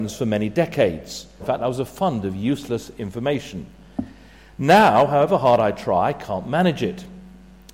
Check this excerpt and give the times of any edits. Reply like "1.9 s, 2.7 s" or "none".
1.4 s

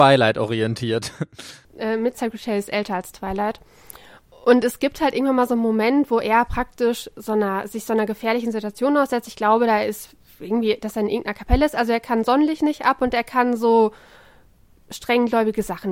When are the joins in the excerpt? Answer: 2.1 s

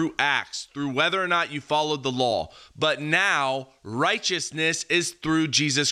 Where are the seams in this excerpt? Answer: none

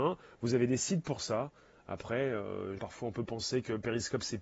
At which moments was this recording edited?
2.8 s

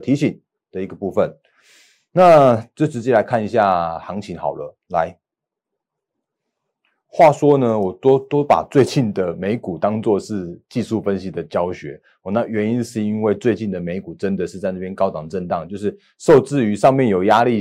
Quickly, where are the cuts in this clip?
none

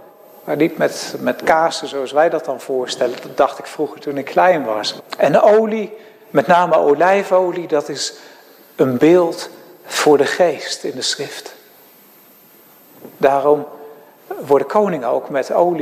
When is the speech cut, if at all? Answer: 5.0 s, 13.1 s

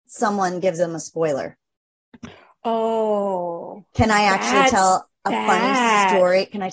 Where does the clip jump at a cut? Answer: none

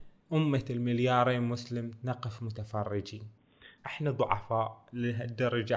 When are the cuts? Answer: 3.8 s

